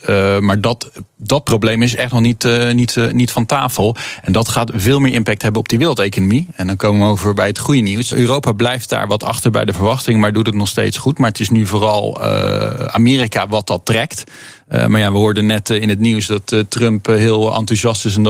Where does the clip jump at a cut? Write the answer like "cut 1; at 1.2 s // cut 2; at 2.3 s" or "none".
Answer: cut 1; at 8.1 s